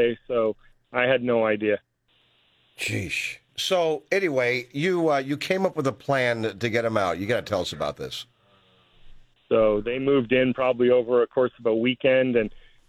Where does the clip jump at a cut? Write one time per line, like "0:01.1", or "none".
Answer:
0:03.5
0:09.3